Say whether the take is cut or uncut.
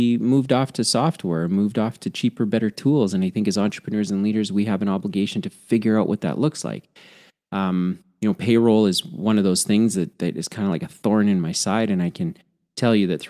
uncut